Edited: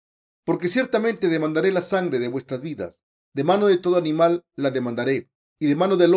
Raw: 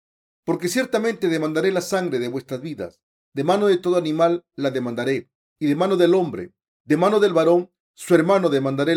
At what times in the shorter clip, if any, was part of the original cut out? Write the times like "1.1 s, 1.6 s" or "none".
none